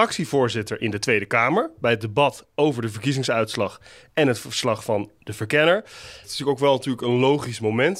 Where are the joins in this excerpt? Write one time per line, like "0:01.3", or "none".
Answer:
0:06.2